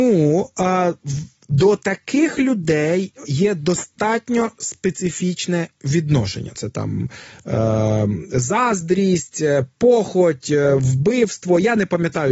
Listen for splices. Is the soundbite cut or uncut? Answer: cut